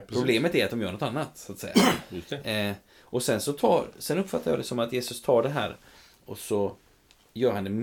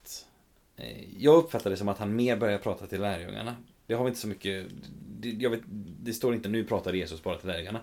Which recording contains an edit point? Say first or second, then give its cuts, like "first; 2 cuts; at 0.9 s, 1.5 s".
second; 1 cut; at 6.4 s